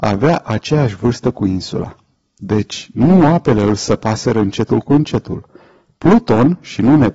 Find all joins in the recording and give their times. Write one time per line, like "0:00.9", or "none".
none